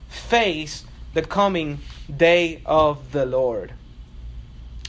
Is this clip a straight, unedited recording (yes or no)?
yes